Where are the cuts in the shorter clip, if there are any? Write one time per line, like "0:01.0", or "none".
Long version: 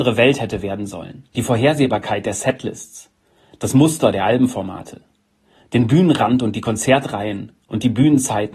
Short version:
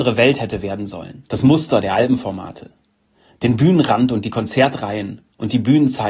0:01.3